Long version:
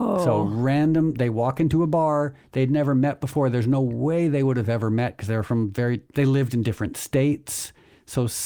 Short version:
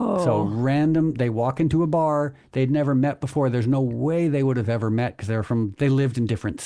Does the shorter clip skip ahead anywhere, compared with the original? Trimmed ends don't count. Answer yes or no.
yes